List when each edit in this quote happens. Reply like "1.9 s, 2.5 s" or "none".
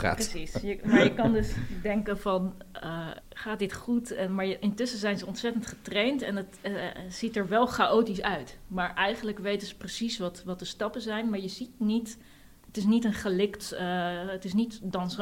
3.2 s